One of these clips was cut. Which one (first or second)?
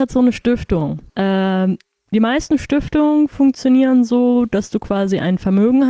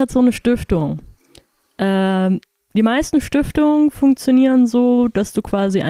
first